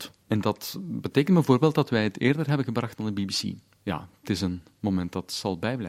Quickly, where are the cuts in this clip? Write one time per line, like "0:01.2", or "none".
none